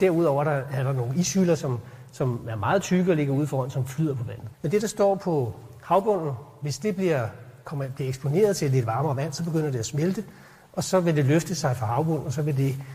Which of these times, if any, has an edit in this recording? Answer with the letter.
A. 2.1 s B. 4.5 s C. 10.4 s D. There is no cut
B